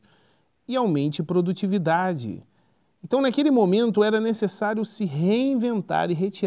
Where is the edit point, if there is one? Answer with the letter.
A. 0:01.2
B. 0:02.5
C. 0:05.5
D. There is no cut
D